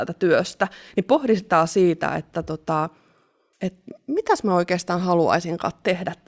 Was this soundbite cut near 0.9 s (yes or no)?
no